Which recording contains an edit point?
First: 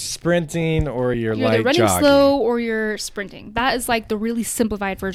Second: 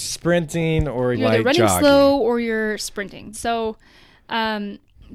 second; 2 cuts; at 1.1 s, 3.3 s

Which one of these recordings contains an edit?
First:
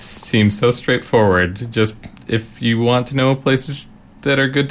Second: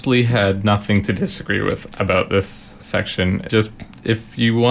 second; 1 cut; at 3.5 s

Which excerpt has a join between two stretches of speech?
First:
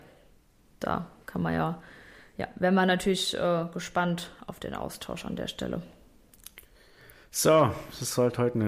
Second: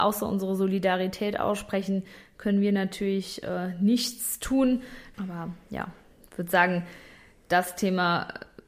second; 1 cut; at 5.1 s

